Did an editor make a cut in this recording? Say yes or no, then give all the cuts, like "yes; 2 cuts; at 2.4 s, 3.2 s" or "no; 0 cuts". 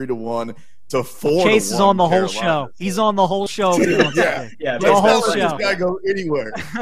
yes; 1 cut; at 4.8 s